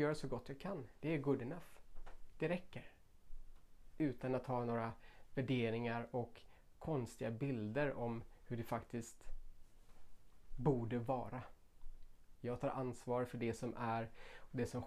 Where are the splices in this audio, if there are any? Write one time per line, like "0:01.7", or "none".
0:03.9
0:12.4